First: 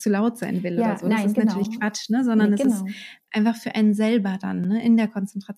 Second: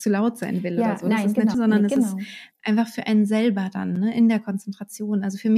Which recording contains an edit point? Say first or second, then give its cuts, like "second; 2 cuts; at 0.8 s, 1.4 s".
second; 1 cut; at 1.5 s